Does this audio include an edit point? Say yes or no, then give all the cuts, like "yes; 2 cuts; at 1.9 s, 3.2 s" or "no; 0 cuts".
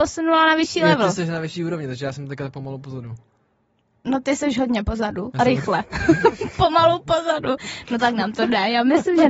no; 0 cuts